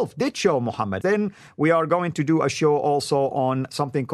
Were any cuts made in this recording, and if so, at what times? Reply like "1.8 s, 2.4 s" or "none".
1.0 s